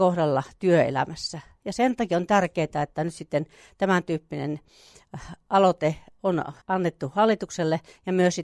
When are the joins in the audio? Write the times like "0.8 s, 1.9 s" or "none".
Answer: 6.6 s